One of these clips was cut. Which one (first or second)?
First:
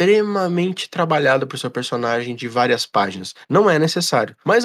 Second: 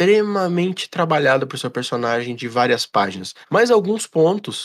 second